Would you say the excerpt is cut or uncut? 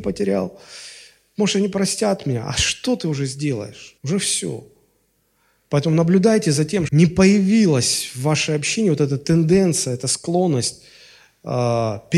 cut